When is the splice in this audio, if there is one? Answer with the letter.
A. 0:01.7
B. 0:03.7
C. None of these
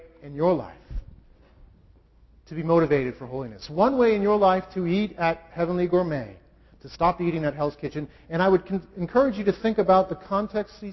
C